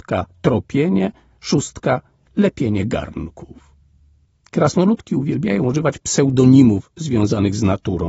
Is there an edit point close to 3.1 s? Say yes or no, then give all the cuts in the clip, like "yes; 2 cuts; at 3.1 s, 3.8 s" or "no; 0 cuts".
no; 1 cut; at 4.4 s